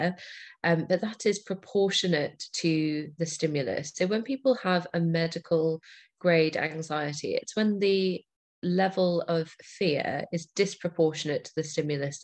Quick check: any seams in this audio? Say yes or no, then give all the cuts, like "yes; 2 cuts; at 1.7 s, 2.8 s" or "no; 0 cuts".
no; 0 cuts